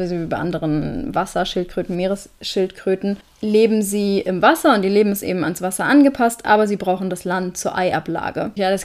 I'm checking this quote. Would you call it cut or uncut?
uncut